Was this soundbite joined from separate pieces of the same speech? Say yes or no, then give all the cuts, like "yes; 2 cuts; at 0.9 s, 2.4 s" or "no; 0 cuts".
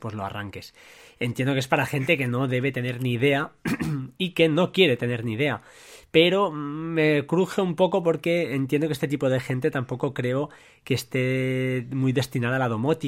no; 0 cuts